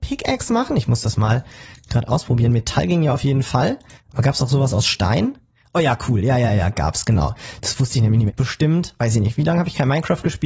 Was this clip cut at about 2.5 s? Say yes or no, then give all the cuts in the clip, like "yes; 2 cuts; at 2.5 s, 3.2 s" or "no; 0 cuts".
no; 2 cuts; at 6.5 s, 8.3 s